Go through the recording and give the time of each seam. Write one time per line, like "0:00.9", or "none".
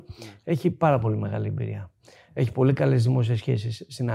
none